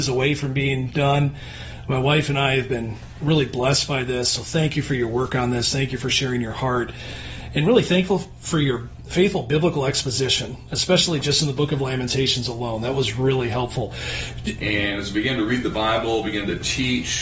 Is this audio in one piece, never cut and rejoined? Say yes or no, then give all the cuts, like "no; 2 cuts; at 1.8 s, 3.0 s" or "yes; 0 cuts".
no; 1 cut; at 14.6 s